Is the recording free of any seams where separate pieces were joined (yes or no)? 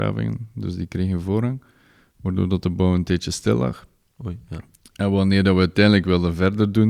yes